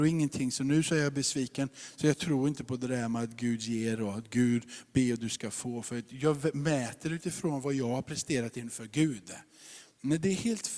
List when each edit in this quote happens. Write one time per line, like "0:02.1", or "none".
none